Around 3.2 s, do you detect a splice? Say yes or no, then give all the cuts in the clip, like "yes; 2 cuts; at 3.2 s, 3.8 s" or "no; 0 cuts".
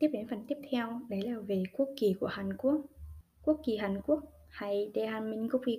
yes; 1 cut; at 3.2 s